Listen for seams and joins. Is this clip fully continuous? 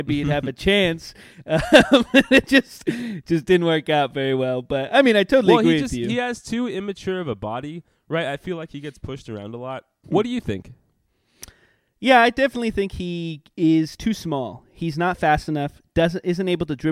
yes; 0 cuts

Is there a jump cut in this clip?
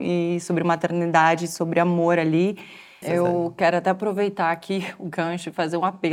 yes; 1 cut; at 3.0 s

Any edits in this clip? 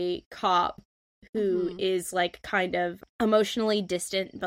no; 0 cuts

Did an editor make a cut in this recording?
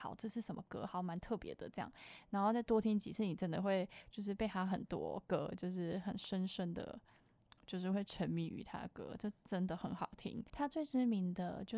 no; 0 cuts

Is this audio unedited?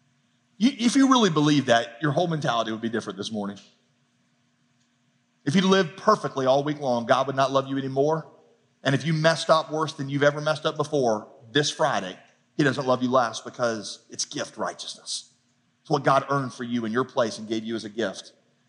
yes; 0 cuts

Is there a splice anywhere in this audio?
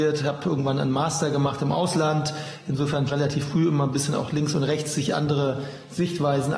yes; 1 cut; at 3.1 s

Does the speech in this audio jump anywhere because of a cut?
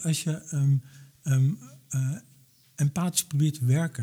no; 0 cuts

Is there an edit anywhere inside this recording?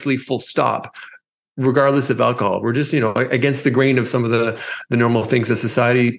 no; 0 cuts

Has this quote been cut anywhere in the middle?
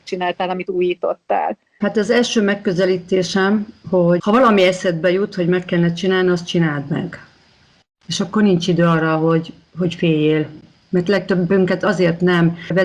no; 0 cuts

